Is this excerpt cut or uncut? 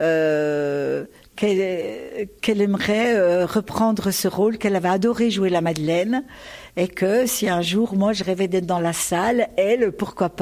uncut